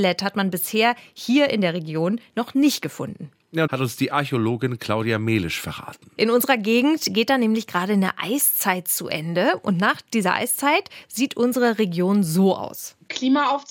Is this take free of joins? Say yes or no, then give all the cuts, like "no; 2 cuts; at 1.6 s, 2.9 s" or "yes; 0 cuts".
no; 2 cuts; at 3.7 s, 6.2 s